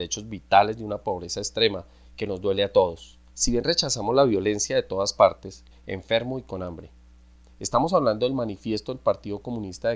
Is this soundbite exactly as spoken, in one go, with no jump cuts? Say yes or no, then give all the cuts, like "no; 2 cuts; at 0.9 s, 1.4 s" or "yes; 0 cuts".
no; 3 cuts; at 3.3 s, 5.7 s, 7.5 s